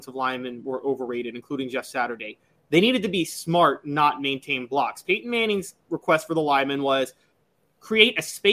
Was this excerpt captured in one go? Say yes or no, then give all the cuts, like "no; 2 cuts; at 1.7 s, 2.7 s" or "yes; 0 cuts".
yes; 0 cuts